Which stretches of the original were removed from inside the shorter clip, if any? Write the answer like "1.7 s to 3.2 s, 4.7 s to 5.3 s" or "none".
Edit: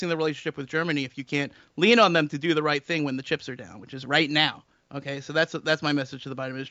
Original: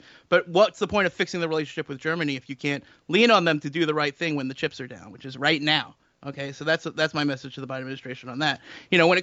none